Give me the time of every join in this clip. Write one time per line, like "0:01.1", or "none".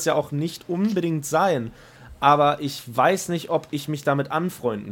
none

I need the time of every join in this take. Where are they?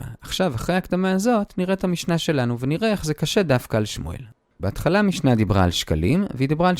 0:04.6

